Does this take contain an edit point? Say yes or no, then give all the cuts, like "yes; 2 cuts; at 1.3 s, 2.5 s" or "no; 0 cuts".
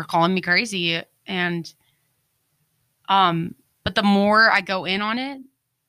no; 0 cuts